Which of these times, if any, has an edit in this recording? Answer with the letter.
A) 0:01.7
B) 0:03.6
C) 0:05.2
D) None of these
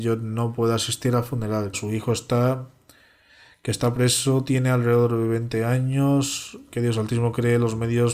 A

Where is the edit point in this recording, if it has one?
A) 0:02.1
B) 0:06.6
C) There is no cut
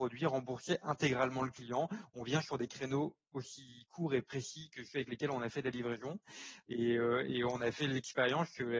B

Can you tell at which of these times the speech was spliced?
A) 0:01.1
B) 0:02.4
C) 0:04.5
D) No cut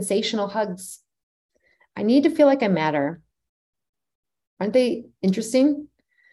C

